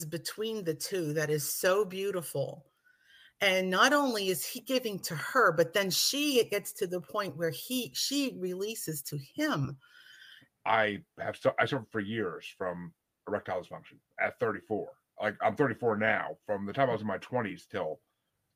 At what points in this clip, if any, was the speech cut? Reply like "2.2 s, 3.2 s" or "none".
10.5 s